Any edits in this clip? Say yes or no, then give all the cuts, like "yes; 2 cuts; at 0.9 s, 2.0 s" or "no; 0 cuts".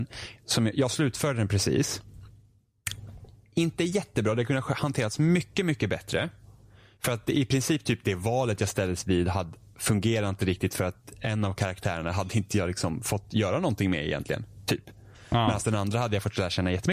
no; 0 cuts